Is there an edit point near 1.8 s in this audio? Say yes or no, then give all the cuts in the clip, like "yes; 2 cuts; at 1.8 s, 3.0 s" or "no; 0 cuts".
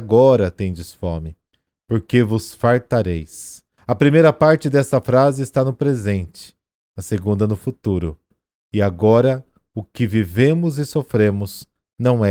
no; 1 cut; at 3.8 s